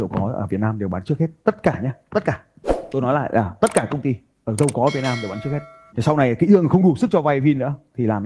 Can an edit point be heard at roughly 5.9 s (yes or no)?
yes